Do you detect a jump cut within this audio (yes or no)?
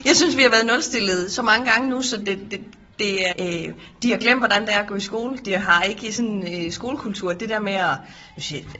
yes